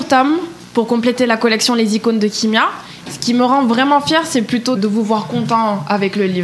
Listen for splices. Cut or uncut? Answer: cut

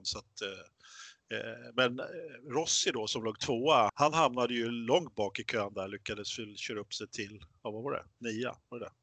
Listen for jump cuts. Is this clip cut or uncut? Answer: cut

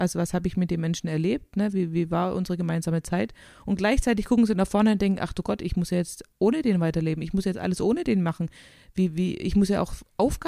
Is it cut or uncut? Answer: uncut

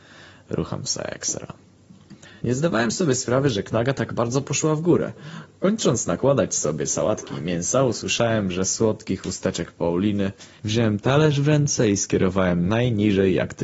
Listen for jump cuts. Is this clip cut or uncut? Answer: cut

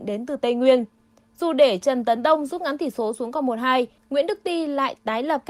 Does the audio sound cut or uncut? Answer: cut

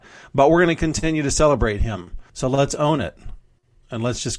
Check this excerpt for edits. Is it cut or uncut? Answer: cut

